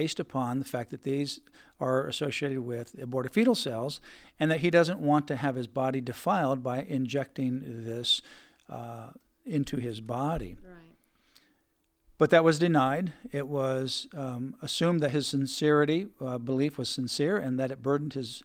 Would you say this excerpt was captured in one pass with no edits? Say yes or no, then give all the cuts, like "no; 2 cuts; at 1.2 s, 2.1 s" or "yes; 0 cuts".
yes; 0 cuts